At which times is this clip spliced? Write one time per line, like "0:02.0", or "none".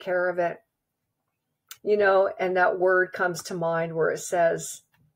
0:01.8